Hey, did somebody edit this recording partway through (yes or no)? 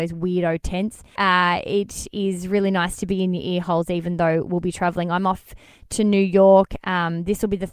yes